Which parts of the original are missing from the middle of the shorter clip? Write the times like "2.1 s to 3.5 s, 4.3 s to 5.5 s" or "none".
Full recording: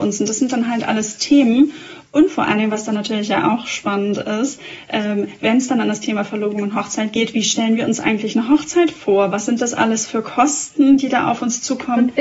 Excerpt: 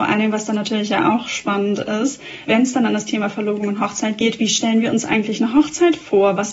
4.8 s to 5.4 s